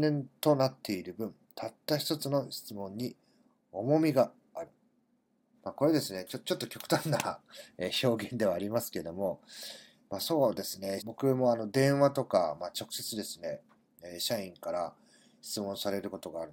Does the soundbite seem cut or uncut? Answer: cut